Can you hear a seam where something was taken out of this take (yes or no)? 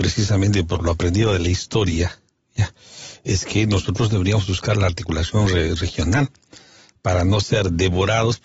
no